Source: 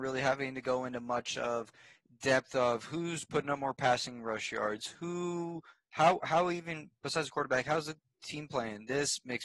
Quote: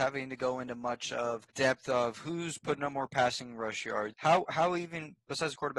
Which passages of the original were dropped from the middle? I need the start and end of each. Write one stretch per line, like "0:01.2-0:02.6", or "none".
0:01.8-0:02.2
0:04.8-0:05.9